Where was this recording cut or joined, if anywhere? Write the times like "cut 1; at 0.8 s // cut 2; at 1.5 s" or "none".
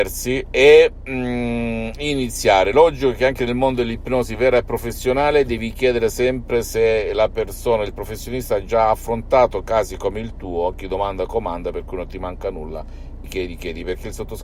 cut 1; at 13.2 s